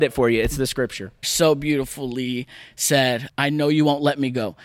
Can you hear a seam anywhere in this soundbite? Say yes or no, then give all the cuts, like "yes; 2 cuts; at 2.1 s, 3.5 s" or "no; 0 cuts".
yes; 2 cuts; at 1.2 s, 3.3 s